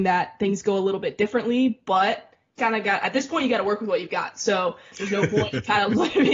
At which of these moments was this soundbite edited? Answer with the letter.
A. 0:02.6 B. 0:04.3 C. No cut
A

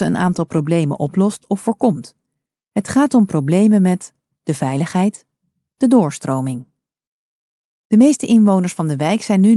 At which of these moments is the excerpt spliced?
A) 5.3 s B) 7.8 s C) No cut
C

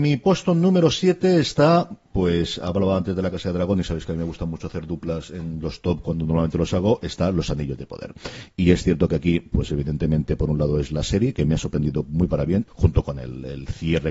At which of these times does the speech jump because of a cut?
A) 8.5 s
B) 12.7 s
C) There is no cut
B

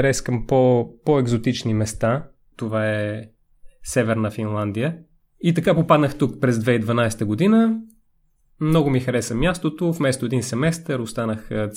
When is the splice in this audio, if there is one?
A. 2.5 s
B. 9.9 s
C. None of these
A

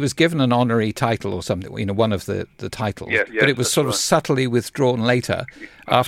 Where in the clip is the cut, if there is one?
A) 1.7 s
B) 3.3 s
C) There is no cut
B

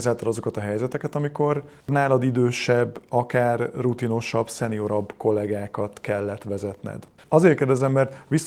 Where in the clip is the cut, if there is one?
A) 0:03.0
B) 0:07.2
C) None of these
B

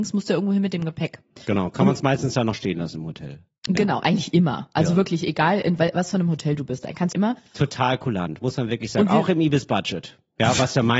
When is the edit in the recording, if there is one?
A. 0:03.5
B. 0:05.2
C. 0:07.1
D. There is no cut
C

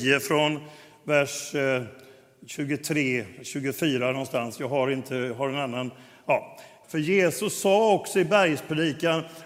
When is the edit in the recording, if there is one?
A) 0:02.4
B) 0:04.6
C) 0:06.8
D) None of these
C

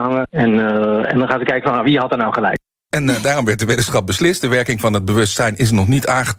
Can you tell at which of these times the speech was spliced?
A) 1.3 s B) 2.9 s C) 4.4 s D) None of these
B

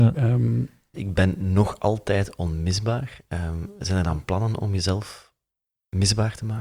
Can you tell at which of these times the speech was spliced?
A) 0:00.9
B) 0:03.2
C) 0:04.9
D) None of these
A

